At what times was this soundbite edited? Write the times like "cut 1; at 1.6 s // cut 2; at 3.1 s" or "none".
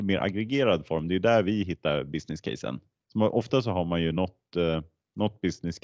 none